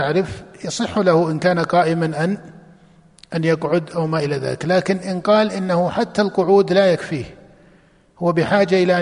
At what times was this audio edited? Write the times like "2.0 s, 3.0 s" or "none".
none